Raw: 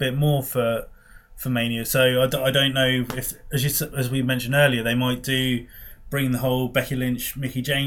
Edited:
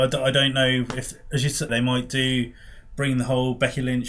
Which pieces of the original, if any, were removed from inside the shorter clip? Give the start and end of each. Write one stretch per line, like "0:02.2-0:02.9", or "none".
0:03.9-0:04.8